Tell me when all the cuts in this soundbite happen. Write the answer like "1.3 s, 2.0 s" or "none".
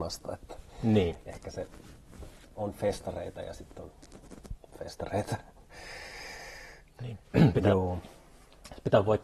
2.4 s, 6.8 s